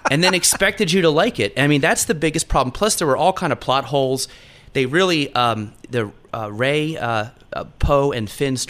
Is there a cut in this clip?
no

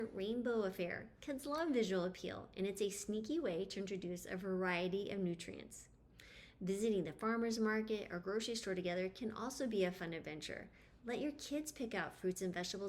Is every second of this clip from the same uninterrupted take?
yes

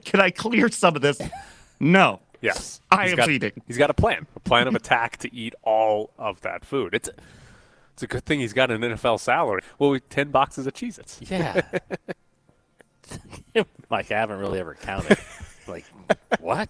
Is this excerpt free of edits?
no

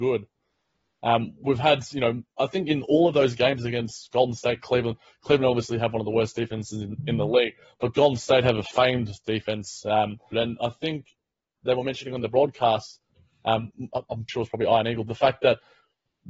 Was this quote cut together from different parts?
yes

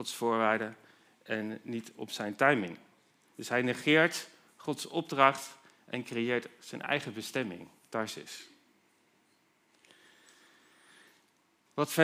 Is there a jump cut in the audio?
no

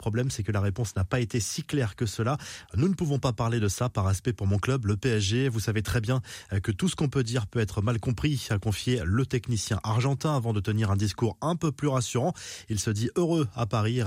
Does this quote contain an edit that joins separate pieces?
no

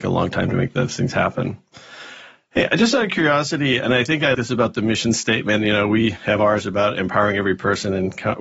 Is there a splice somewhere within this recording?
yes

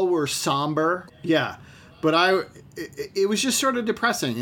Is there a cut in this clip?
yes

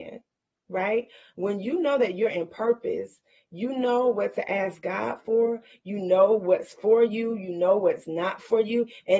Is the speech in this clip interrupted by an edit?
no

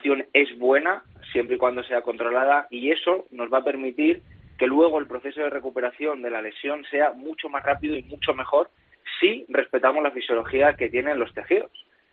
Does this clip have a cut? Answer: no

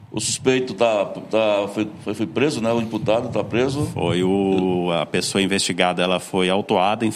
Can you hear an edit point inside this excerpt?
no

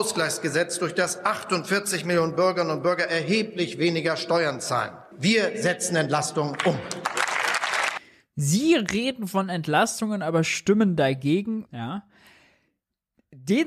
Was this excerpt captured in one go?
no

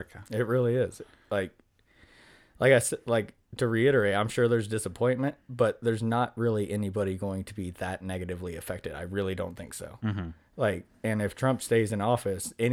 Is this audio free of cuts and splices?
yes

